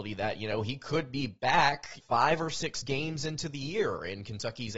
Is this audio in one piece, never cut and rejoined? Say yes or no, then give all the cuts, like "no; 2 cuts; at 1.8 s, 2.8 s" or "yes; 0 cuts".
no; 1 cut; at 2.0 s